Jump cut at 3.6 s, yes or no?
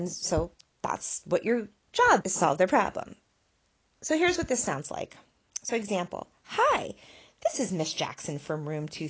no